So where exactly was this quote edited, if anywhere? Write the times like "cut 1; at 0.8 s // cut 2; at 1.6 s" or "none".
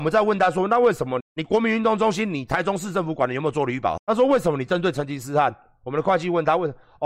cut 1; at 1.2 s // cut 2; at 4.0 s

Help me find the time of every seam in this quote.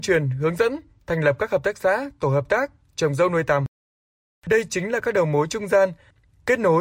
none

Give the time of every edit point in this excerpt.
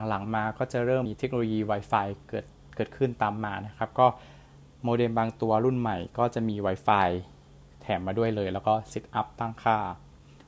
cut 1; at 1.1 s

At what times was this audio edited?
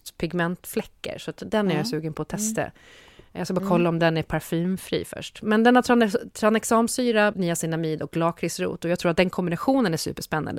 cut 1; at 7.3 s

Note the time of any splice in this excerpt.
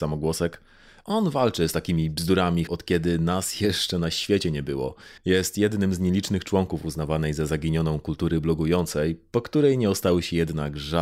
cut 1; at 2.7 s // cut 2; at 5.2 s

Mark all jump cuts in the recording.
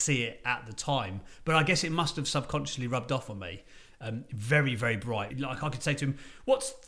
cut 1; at 3.9 s // cut 2; at 5.3 s

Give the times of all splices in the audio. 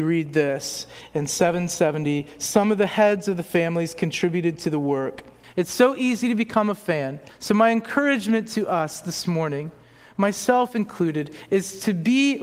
cut 1; at 5.4 s // cut 2; at 7.3 s

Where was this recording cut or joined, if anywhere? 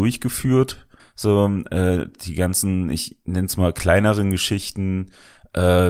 cut 1; at 1.0 s

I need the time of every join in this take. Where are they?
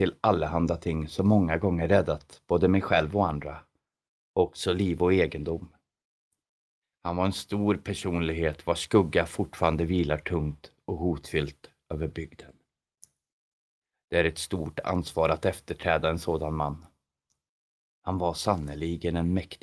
cut 1; at 6.9 s // cut 2; at 17.8 s

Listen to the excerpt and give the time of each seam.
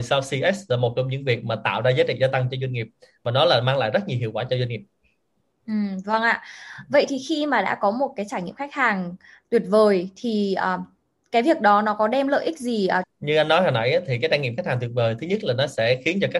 cut 1; at 13.0 s

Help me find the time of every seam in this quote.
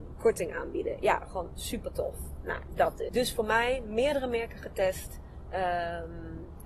cut 1; at 3.1 s

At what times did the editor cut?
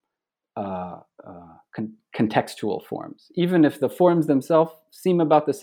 none

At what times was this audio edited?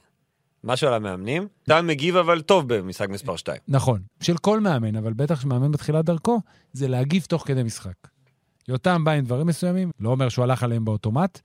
cut 1; at 1.7 s // cut 2; at 4.1 s // cut 3; at 9.9 s

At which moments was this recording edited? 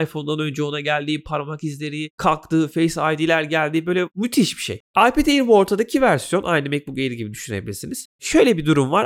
none

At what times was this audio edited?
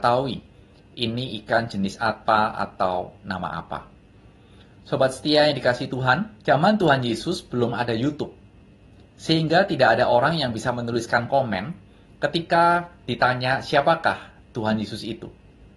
cut 1; at 6.4 s

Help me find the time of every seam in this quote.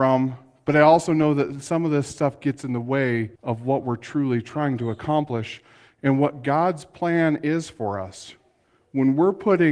cut 1; at 3.3 s

